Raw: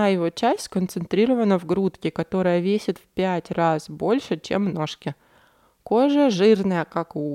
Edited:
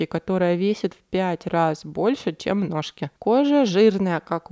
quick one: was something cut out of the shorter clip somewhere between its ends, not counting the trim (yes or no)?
yes